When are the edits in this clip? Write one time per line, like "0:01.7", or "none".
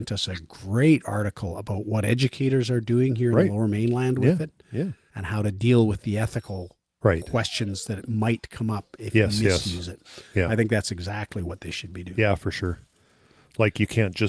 0:05.1

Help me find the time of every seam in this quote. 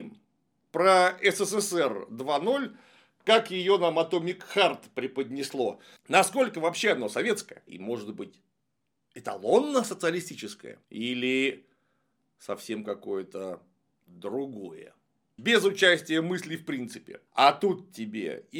0:07.7
0:10.8
0:15.4

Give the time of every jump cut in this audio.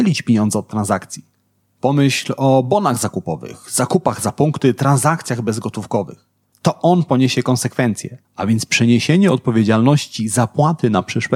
0:06.5
0:08.2

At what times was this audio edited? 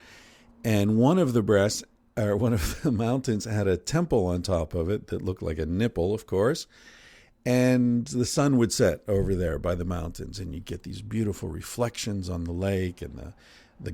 none

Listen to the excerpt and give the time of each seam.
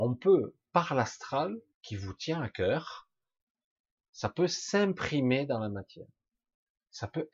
0:01.7

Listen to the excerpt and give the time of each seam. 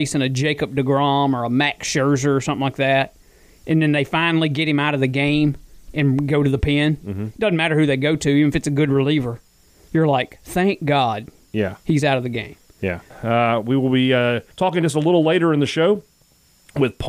0:13.1
0:14.5

